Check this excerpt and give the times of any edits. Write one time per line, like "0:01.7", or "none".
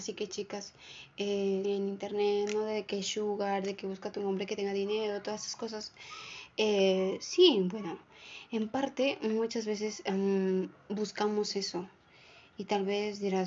0:01.6